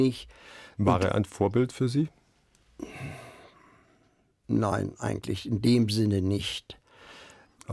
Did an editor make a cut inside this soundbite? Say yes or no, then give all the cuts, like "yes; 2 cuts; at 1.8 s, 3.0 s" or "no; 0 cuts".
no; 0 cuts